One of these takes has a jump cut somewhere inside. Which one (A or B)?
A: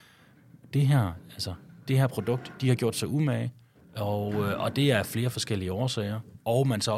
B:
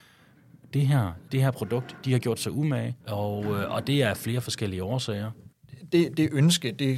B